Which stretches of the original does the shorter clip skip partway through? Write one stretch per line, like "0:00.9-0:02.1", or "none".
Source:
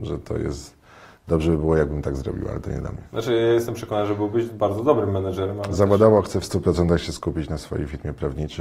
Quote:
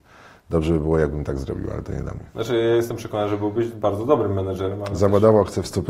none